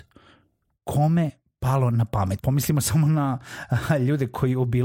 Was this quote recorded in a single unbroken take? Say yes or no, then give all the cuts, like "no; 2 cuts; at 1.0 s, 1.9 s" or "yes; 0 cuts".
no; 1 cut; at 2.4 s